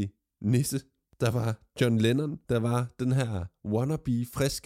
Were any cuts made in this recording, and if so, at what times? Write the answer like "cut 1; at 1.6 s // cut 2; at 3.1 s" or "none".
cut 1; at 2.4 s